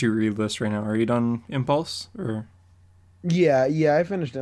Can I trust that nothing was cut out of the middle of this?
yes; 0 cuts

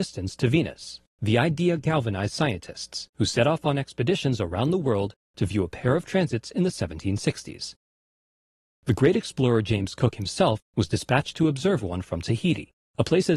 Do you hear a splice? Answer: yes; 1 cut; at 1.1 s

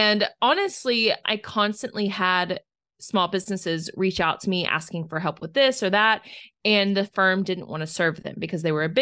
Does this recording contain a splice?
yes; 1 cut; at 1.2 s

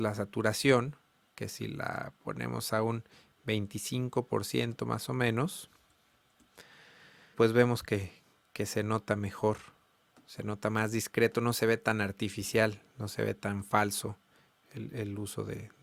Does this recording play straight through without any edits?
no; 1 cut; at 7.3 s

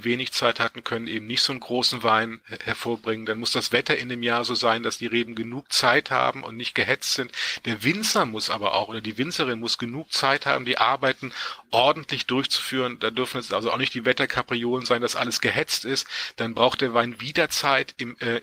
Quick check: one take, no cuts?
yes; 0 cuts

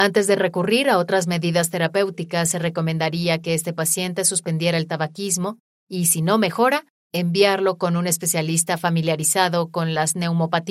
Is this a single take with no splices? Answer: yes; 0 cuts

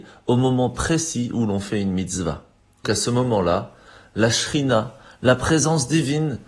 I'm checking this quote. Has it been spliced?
yes; 1 cut; at 2.8 s

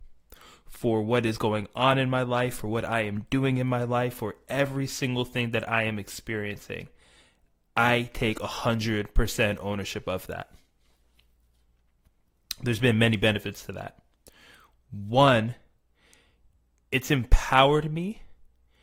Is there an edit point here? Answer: no; 0 cuts

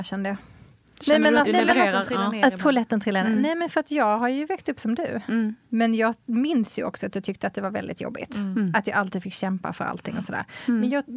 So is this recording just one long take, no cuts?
no; 1 cut; at 1.4 s

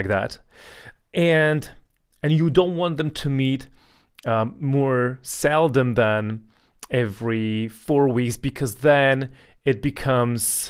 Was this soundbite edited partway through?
no; 0 cuts

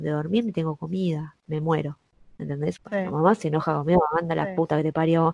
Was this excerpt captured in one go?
no; 1 cut; at 2.8 s

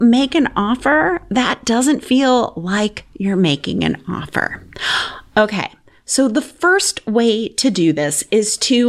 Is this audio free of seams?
yes; 0 cuts

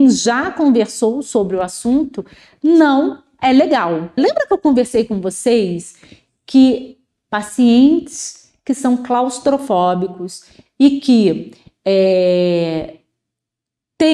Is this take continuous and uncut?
no; 1 cut; at 4.2 s

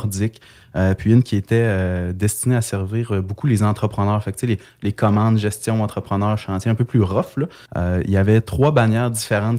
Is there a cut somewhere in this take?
yes; 1 cut; at 7.7 s

